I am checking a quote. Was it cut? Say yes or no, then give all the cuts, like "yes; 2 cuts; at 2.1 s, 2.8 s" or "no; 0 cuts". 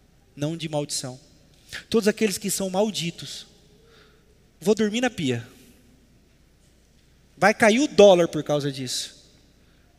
yes; 1 cut; at 4.5 s